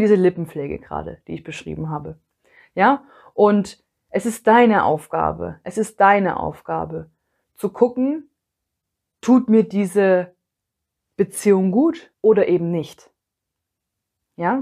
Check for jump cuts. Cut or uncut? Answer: cut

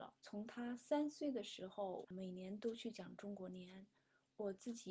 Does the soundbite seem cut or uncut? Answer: cut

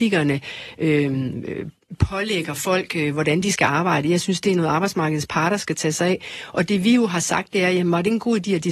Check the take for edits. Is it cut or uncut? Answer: uncut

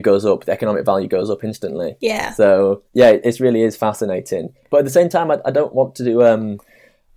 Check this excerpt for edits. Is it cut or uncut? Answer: uncut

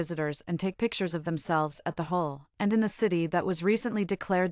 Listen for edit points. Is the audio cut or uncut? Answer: cut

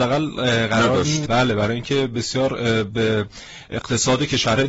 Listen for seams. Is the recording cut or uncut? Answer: cut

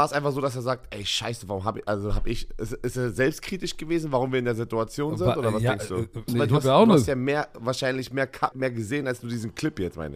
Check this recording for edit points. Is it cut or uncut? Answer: cut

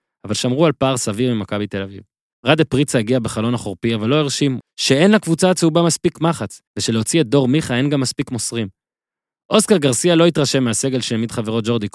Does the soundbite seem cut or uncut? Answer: cut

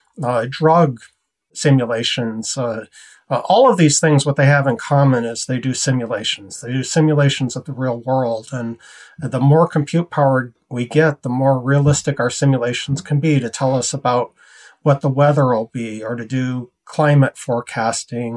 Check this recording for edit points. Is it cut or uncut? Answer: uncut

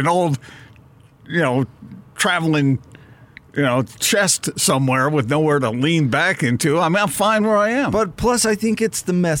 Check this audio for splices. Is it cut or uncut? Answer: uncut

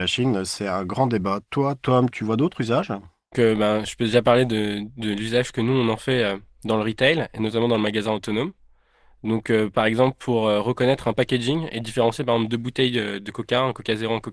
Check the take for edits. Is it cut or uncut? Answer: cut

